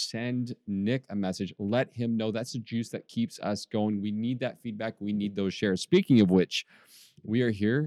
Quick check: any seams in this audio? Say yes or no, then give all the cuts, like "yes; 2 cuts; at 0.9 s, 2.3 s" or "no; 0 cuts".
no; 0 cuts